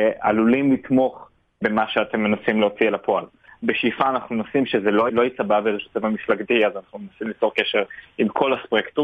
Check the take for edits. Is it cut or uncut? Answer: cut